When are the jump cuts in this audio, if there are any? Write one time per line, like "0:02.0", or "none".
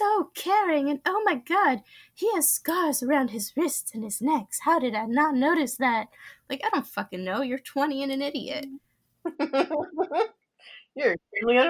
none